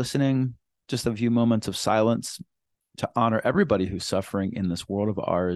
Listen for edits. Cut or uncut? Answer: uncut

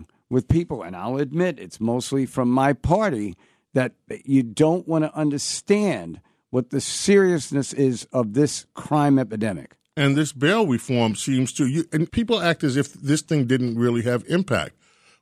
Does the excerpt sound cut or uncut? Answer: cut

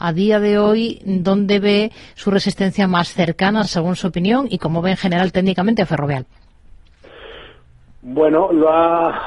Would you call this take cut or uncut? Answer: uncut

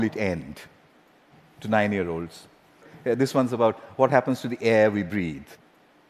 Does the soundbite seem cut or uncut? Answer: uncut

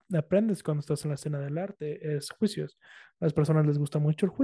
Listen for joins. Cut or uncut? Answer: uncut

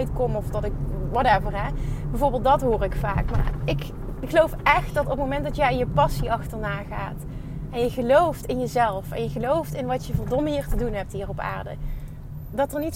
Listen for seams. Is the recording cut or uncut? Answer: uncut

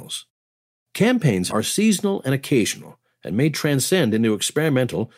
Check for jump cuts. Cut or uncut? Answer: cut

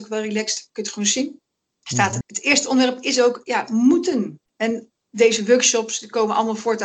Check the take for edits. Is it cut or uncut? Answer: cut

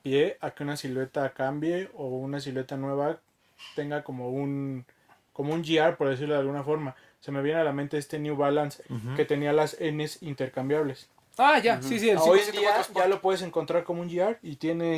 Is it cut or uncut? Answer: cut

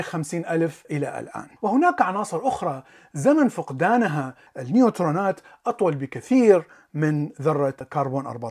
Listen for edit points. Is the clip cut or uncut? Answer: cut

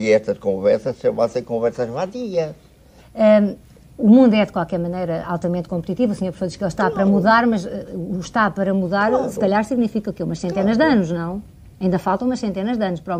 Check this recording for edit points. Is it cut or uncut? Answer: cut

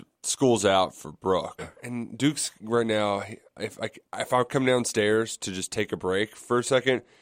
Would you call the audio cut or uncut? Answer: cut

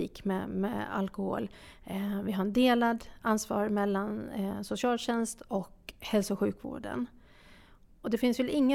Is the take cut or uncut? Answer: uncut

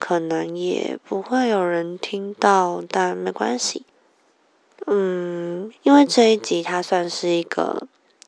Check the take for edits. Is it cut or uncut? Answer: cut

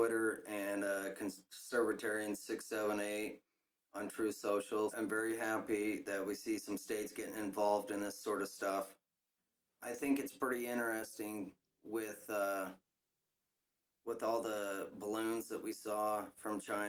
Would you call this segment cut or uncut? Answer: cut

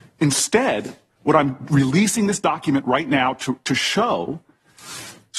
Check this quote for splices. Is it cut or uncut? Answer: uncut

